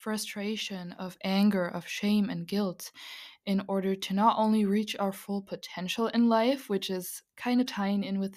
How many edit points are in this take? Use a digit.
1